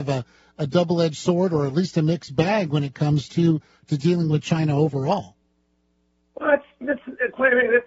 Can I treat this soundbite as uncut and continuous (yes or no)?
yes